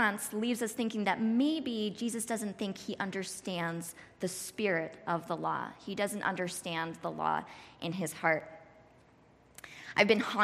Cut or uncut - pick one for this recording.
uncut